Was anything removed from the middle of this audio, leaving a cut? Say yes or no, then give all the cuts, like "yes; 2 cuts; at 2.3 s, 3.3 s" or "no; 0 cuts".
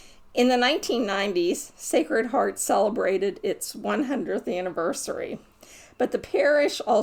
no; 0 cuts